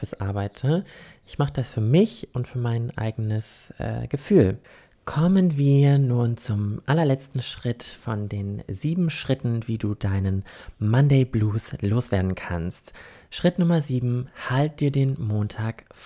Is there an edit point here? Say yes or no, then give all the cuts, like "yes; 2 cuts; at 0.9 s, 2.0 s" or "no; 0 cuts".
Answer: no; 0 cuts